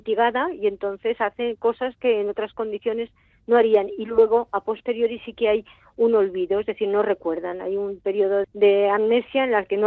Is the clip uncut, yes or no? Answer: no